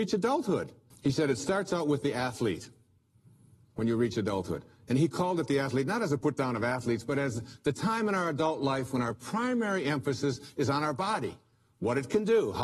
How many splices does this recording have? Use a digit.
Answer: 1